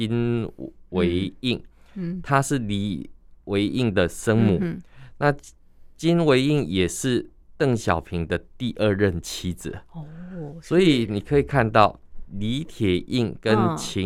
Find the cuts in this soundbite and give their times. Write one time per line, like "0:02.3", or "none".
none